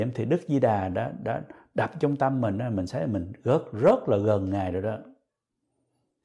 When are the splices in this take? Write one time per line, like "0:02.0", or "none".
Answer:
none